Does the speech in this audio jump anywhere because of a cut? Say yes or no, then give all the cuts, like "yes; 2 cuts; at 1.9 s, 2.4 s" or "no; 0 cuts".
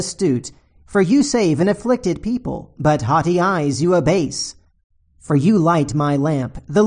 no; 0 cuts